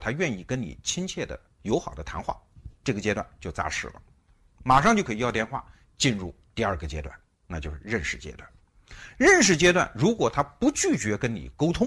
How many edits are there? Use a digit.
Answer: 0